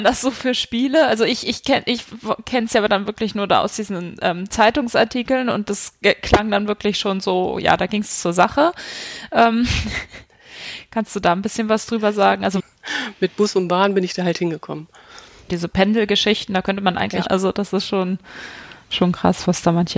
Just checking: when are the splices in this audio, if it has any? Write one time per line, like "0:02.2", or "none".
0:12.6
0:15.5
0:17.3